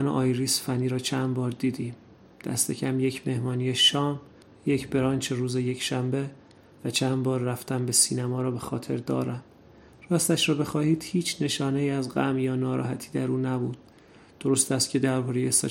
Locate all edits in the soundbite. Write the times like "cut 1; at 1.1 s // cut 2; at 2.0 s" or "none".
none